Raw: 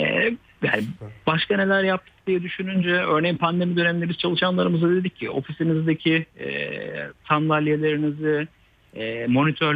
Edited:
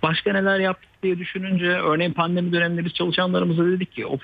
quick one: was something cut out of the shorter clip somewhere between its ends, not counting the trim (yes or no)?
no